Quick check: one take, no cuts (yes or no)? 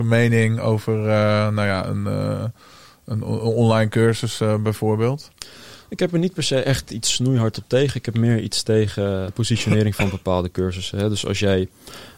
no